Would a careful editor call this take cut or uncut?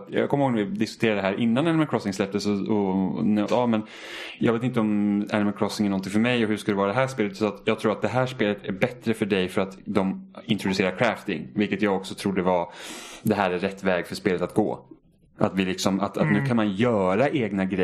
cut